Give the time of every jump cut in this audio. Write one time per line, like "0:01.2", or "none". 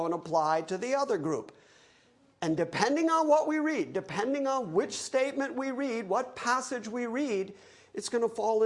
none